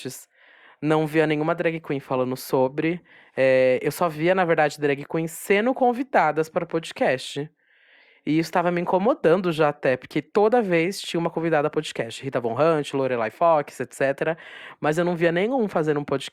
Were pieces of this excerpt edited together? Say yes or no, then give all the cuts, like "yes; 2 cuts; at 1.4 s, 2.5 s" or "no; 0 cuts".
no; 0 cuts